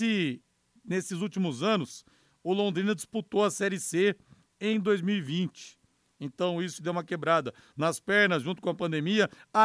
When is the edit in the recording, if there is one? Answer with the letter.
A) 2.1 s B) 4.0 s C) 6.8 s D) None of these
C